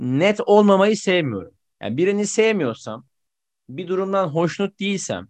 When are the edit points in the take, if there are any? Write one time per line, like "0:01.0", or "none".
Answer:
none